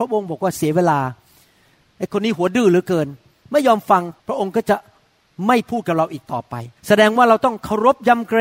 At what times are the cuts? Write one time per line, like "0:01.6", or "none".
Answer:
0:04.2
0:06.8